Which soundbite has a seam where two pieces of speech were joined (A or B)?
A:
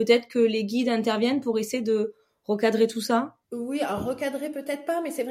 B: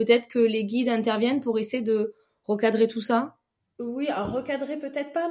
A